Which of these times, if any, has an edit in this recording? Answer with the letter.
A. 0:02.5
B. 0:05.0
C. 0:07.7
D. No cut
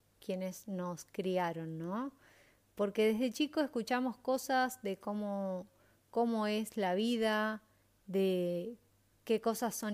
D